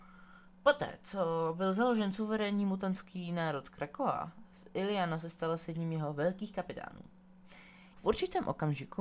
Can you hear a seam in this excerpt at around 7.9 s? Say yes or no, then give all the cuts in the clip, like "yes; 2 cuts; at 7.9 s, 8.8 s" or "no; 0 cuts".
yes; 1 cut; at 7.9 s